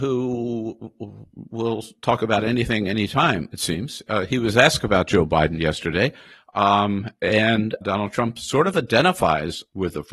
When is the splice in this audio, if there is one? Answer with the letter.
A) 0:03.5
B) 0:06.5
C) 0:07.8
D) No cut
C